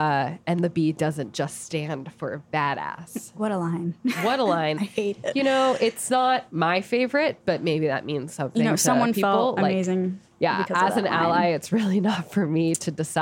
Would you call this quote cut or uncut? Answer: uncut